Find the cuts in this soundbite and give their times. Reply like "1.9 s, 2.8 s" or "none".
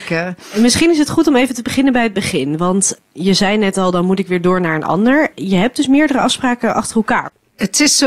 none